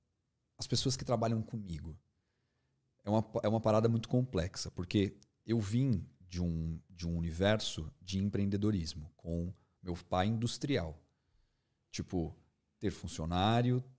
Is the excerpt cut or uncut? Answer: uncut